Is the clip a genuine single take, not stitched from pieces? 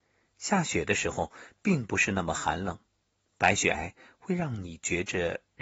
no; 1 cut; at 3.7 s

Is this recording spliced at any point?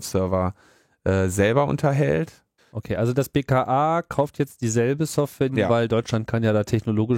yes; 2 cuts; at 2.6 s, 5.5 s

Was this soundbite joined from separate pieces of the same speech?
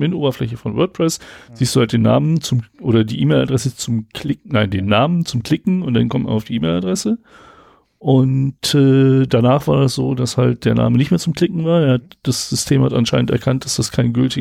no; 0 cuts

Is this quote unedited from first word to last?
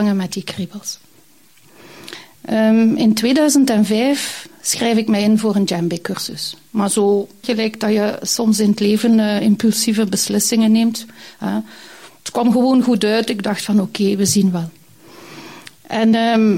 no; 1 cut; at 7.4 s

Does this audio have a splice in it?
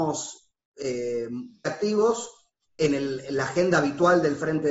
yes; 1 cut; at 1.6 s

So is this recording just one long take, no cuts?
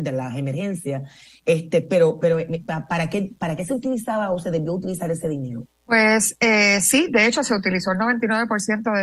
no; 1 cut; at 5.6 s

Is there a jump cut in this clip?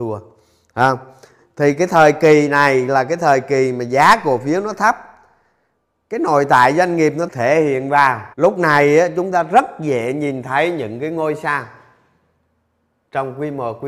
yes; 2 cuts; at 7.3 s, 8.3 s

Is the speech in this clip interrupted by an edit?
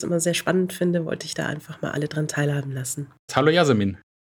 yes; 1 cut; at 3.3 s

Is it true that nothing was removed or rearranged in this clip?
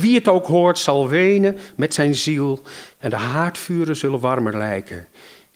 yes; 0 cuts

